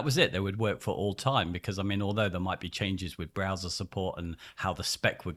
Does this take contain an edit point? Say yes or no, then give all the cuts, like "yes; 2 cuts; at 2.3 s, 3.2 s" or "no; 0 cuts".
no; 0 cuts